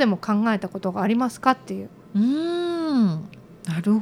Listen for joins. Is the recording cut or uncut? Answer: uncut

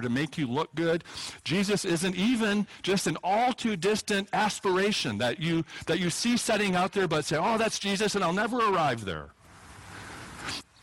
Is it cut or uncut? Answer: uncut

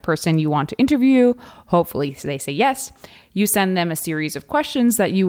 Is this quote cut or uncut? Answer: uncut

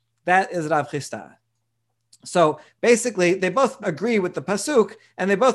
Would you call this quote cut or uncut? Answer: cut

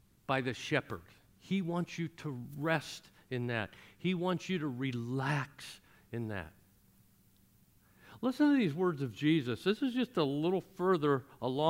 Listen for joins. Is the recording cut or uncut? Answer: uncut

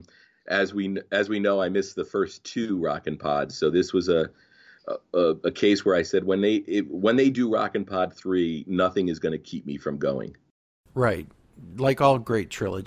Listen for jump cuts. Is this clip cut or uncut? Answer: uncut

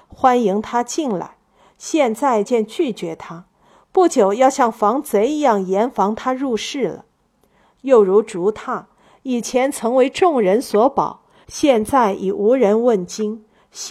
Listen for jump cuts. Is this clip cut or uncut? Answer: cut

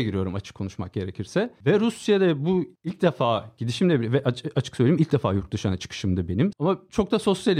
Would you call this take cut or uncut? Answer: cut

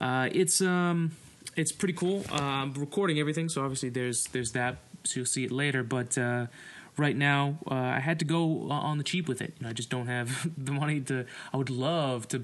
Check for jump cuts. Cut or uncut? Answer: uncut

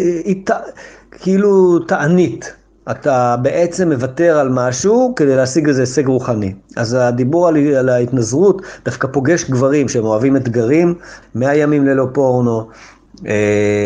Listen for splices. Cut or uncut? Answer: cut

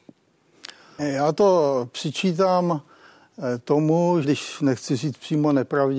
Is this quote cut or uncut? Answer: cut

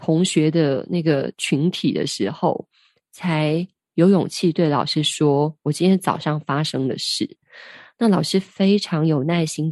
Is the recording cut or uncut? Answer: uncut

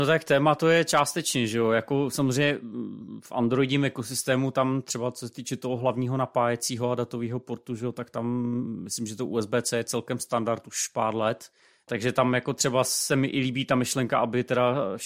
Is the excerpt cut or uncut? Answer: uncut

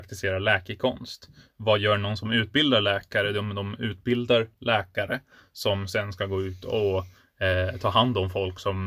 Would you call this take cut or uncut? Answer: uncut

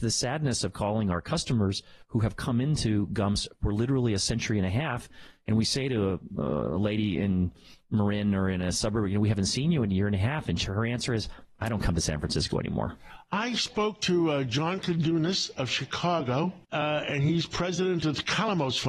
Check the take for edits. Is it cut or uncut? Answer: cut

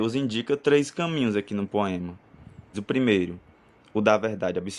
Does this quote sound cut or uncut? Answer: cut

